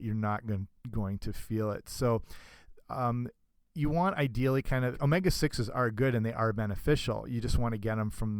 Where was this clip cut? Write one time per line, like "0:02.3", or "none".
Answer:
0:04.9